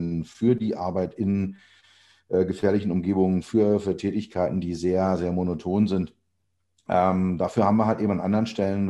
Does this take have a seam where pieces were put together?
no; 0 cuts

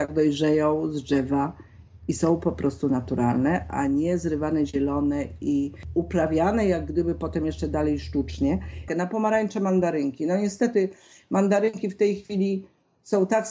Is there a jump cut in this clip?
yes; 1 cut; at 8.9 s

